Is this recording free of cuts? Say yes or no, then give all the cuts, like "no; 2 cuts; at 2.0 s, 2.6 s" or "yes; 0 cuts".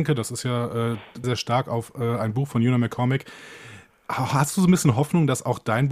no; 1 cut; at 1.2 s